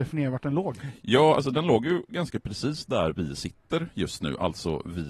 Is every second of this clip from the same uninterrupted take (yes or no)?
yes